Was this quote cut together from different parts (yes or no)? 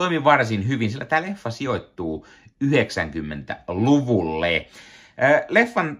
no